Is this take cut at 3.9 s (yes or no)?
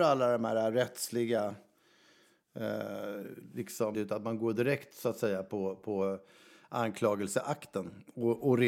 yes